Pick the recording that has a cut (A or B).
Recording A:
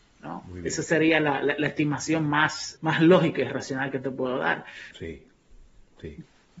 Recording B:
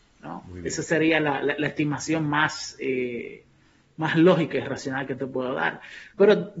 A